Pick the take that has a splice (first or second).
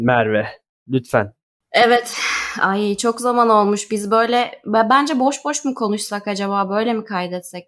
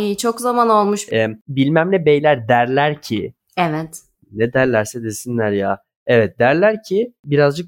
second